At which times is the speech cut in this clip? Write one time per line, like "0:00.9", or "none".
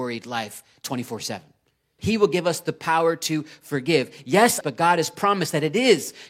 0:02.0
0:04.6